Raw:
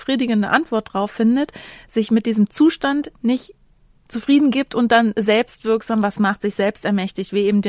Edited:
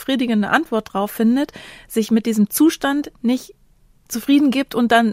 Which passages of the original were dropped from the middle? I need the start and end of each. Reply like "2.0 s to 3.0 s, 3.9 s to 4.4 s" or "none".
none